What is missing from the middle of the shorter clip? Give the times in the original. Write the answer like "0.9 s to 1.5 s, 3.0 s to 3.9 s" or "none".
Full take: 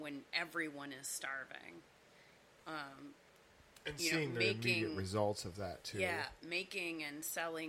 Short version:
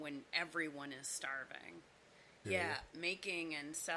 2.4 s to 5.9 s